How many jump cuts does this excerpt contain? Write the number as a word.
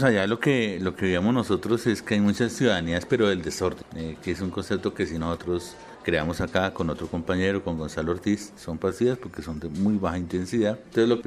one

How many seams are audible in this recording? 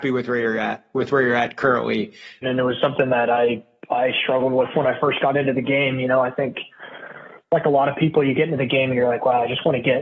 one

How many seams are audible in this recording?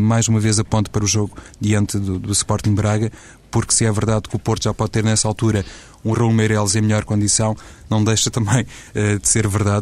zero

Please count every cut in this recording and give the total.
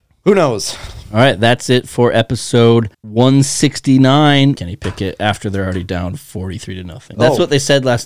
three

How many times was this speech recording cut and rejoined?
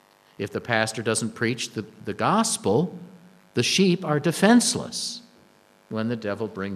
zero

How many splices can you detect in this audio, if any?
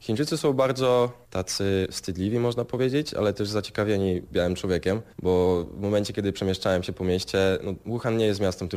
one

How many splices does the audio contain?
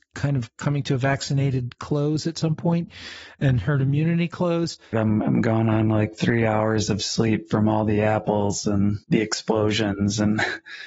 two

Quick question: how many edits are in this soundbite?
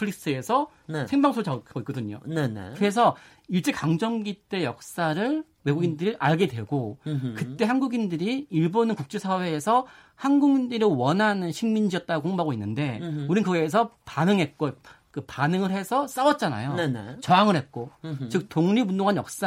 zero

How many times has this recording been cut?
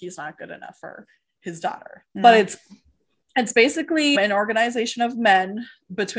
two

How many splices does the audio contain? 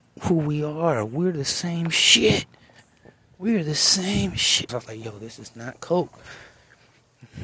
one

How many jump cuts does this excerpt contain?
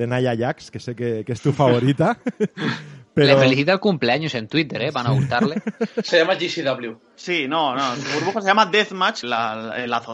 two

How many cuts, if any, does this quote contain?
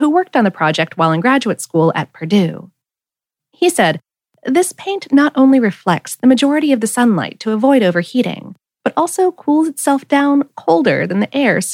zero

